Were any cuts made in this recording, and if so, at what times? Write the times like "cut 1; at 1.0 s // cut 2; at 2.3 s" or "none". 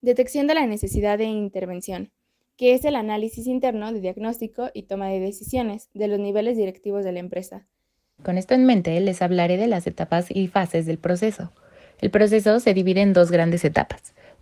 cut 1; at 8.2 s